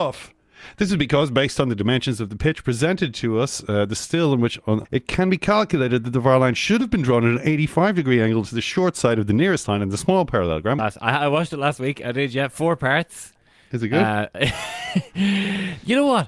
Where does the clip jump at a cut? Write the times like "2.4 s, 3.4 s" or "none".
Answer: 4.8 s, 10.8 s